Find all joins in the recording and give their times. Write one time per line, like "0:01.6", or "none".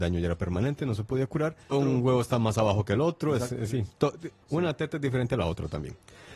0:01.7
0:04.4